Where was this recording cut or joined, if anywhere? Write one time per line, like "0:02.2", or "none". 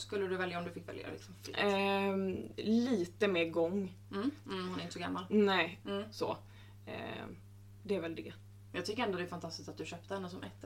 0:04.4
0:05.8